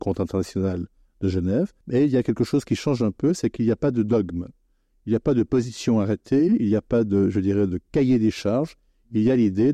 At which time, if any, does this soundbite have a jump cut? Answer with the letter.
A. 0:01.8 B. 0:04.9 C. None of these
A